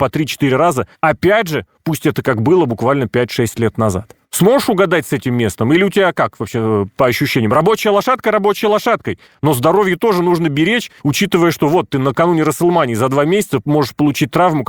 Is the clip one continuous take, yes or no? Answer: yes